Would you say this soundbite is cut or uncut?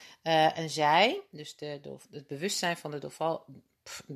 cut